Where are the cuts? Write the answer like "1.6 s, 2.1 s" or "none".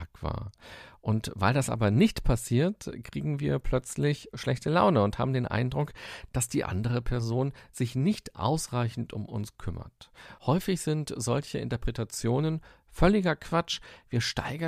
none